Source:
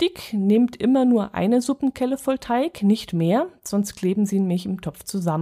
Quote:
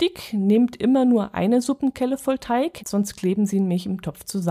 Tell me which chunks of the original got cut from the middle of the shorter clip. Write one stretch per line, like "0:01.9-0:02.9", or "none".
0:02.8-0:03.6